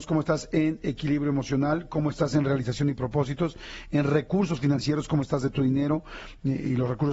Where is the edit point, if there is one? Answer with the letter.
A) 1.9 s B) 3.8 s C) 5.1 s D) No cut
D